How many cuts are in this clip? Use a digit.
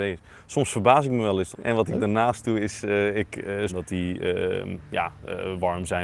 2